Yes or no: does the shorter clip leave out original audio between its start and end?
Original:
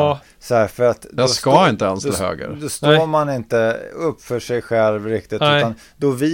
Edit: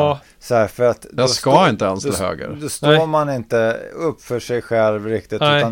no